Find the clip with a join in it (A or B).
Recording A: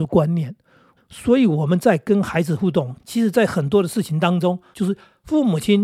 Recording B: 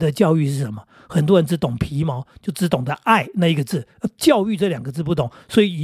A